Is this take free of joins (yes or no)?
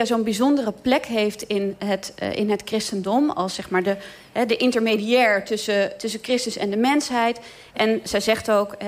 yes